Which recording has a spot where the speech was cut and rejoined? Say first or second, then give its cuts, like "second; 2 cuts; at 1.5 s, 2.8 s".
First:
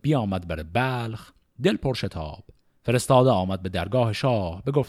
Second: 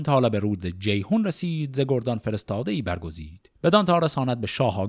second; 1 cut; at 3.6 s